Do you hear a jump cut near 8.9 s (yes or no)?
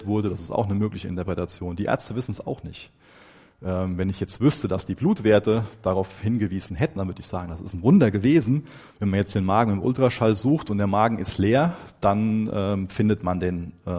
yes